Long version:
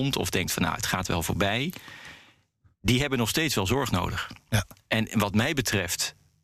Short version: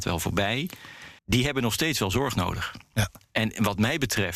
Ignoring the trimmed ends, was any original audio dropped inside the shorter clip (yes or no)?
yes